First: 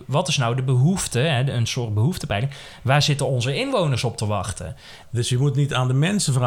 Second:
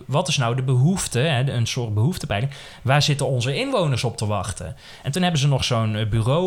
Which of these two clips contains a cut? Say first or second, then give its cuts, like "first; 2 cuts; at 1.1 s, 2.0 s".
first; 1 cut; at 5.0 s